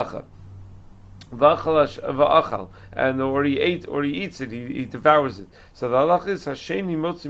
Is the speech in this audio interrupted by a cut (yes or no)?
no